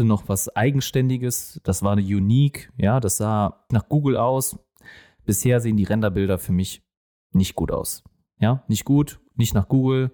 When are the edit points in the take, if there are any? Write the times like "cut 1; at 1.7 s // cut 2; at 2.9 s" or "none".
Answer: cut 1; at 3.7 s